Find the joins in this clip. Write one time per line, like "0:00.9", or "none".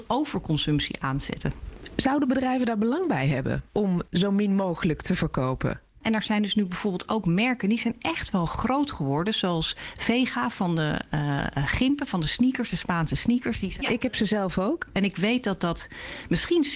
0:06.0
0:13.8
0:14.9